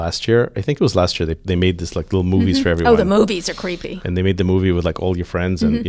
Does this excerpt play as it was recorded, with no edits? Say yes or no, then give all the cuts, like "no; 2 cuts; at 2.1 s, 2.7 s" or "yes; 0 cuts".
yes; 0 cuts